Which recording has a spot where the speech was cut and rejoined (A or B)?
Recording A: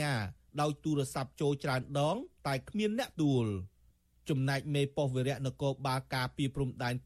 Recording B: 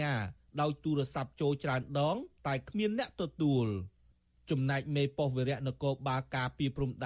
A